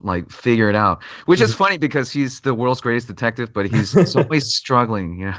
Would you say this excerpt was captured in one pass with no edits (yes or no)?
yes